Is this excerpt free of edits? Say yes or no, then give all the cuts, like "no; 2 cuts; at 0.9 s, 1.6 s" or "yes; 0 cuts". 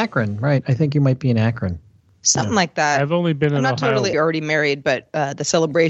no; 1 cut; at 4.1 s